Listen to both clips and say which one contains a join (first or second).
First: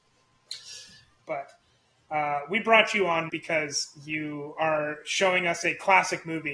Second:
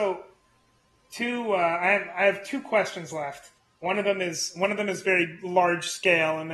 first